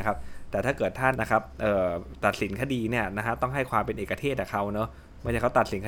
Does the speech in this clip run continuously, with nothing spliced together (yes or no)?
no